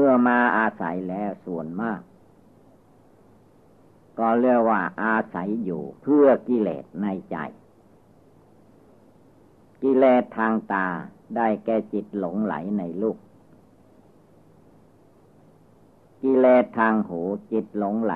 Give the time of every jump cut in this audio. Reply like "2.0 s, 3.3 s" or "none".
6.0 s